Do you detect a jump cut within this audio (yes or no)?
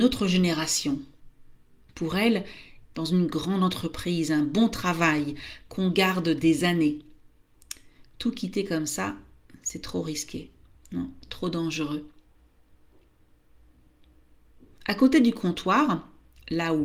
yes